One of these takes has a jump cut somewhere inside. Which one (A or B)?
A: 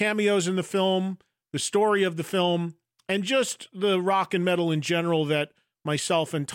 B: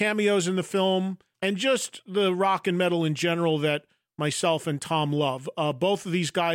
B